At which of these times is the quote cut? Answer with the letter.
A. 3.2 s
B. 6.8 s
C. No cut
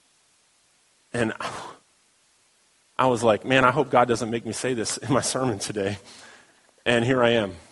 C